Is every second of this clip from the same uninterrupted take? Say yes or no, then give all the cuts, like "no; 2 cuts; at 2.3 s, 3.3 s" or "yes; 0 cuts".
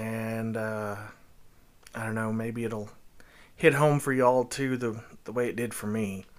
yes; 0 cuts